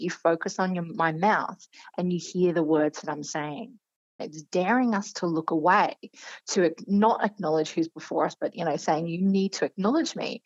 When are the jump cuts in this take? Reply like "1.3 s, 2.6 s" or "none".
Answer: 4.2 s